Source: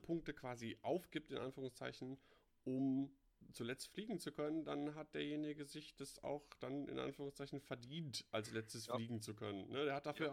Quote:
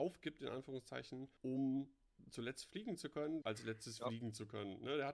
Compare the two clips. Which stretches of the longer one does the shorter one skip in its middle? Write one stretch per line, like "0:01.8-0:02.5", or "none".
0:02.3-0:02.6
0:04.6-0:08.3